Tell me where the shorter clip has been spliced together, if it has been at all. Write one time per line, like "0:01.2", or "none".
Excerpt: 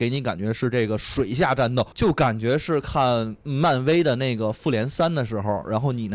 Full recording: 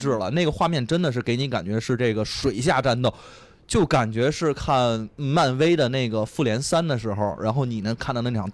0:01.9